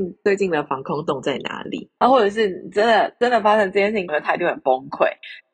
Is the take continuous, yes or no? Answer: no